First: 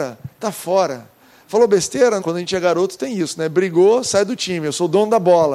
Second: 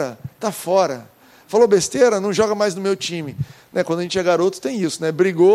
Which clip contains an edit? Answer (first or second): first